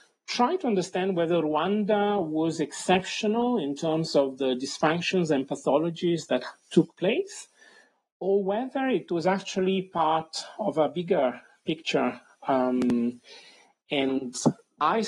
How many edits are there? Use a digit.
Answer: 0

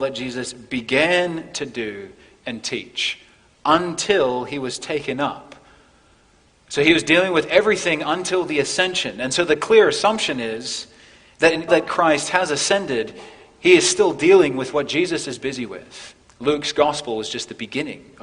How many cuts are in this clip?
2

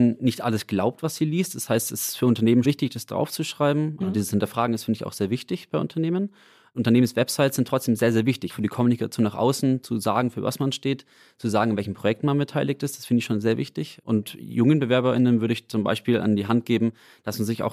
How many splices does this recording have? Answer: 3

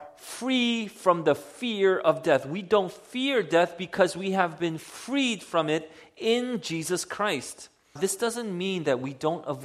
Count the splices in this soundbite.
1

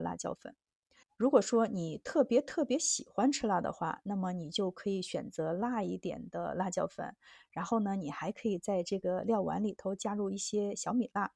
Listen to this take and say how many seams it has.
1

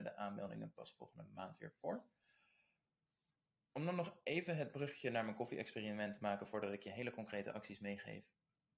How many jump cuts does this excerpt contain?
0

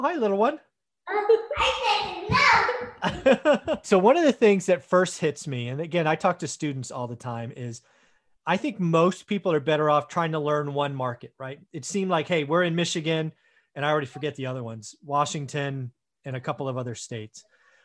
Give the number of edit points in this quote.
1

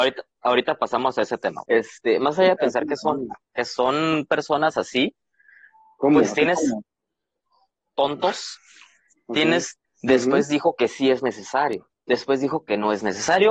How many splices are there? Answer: 2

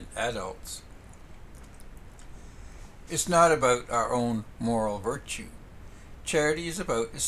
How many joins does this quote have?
1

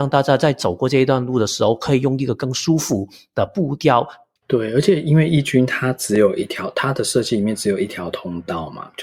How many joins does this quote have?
1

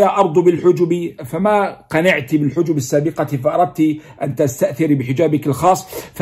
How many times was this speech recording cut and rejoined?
1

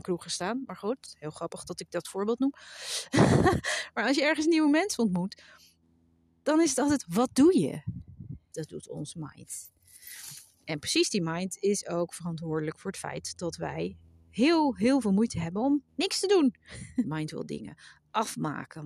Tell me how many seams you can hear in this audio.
2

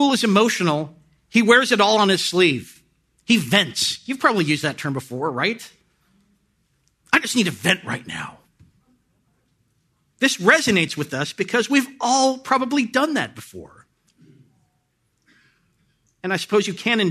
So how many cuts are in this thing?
0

